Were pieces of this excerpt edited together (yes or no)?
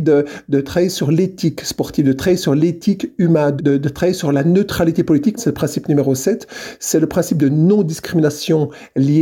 yes